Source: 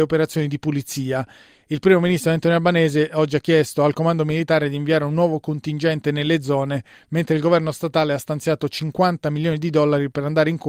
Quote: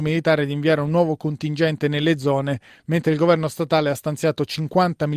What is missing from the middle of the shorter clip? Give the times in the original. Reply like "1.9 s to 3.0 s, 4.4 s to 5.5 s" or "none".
none